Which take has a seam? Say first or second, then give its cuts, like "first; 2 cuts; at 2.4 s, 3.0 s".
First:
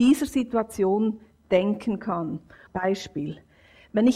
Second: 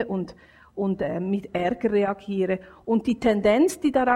first; 1 cut; at 2.7 s